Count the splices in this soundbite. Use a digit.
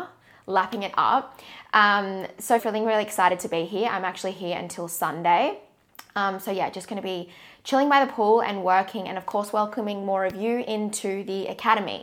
1